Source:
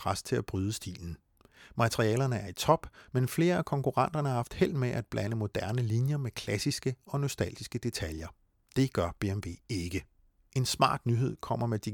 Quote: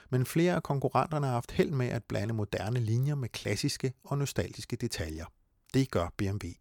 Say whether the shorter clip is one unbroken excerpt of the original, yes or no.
yes